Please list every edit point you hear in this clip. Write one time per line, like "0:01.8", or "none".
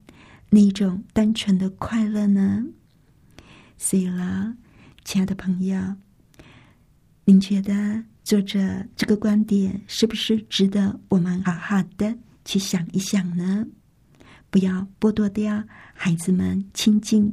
0:11.4